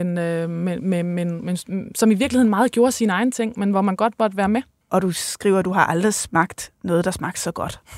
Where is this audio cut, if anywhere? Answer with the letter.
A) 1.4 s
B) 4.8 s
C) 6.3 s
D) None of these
B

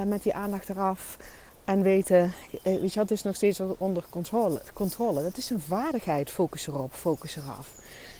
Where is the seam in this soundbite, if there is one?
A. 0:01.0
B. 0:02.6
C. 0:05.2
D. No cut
D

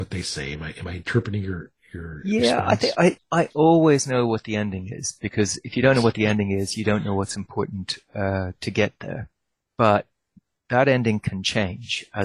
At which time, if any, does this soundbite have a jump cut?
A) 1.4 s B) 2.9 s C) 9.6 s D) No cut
C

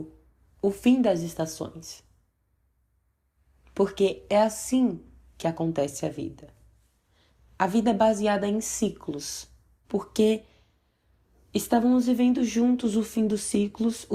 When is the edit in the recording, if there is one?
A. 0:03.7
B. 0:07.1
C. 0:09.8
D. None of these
C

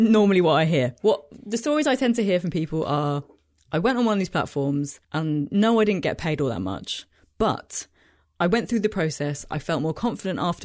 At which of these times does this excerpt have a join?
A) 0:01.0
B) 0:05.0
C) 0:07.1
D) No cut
B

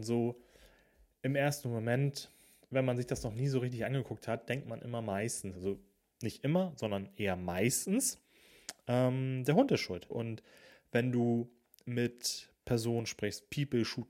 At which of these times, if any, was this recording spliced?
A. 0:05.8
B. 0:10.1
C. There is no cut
B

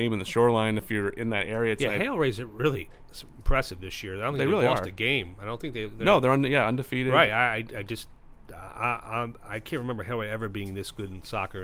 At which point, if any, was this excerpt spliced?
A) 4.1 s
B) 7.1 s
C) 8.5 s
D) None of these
D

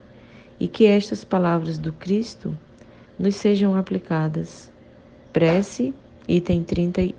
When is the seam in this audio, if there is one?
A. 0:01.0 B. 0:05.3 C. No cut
B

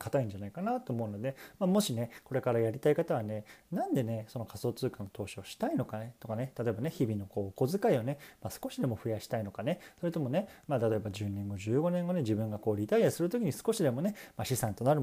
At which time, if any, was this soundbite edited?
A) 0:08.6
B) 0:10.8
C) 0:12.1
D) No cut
D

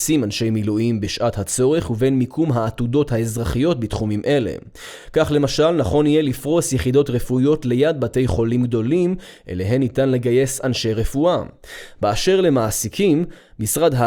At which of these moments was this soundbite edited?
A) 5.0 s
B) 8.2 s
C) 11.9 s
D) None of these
D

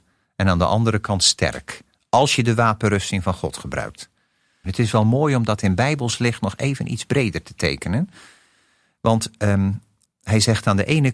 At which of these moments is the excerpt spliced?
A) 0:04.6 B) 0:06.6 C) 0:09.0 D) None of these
A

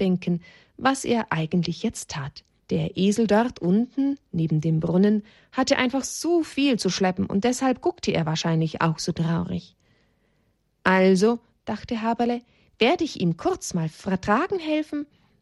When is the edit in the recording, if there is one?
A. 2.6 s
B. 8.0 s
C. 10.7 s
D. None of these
A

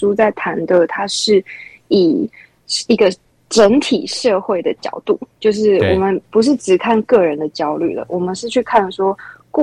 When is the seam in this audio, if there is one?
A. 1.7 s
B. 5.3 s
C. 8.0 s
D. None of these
D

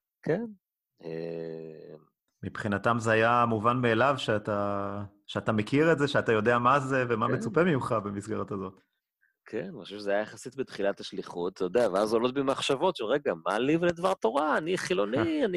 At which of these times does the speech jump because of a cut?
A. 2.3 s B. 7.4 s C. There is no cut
A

